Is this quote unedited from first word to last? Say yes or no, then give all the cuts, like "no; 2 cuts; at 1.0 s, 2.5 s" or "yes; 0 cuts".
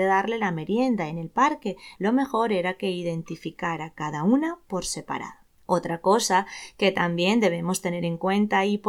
no; 2 cuts; at 2.0 s, 5.5 s